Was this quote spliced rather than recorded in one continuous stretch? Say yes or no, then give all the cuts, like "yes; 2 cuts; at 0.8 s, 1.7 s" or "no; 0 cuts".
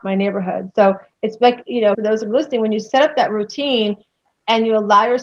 yes; 1 cut; at 1.9 s